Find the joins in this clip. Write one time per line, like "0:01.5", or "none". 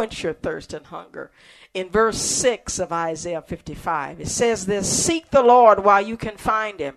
none